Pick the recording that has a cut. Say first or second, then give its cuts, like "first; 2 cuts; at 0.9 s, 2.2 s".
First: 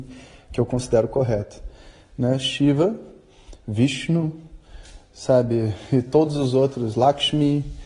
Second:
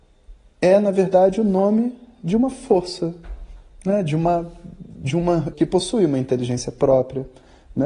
second; 1 cut; at 5.5 s